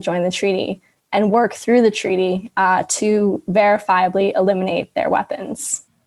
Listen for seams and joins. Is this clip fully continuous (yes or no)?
yes